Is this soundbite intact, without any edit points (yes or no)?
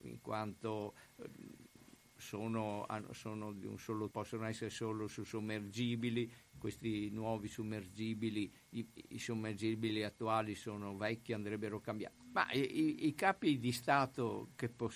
no